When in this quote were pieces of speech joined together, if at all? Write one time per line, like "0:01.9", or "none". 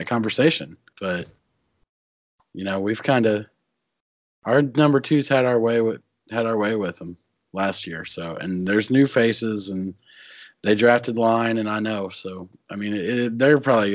0:00.9